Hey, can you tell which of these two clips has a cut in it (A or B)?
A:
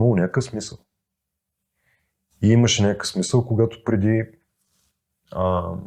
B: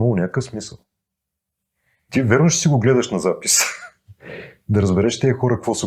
B